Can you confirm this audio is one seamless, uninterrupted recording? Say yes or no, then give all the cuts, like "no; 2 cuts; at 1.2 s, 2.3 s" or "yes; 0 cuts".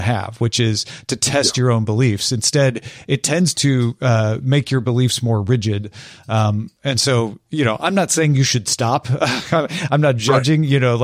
yes; 0 cuts